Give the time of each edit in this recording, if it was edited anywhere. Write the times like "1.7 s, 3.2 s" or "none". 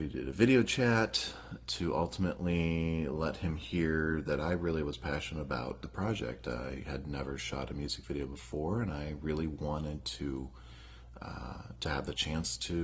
none